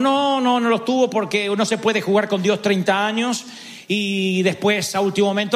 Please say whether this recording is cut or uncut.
uncut